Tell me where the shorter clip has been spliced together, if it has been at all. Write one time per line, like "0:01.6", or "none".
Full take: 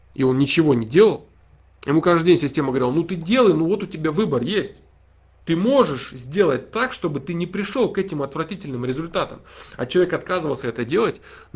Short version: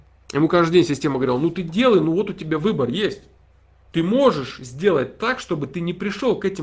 none